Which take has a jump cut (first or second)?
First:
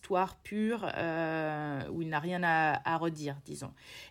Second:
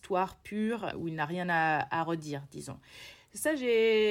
second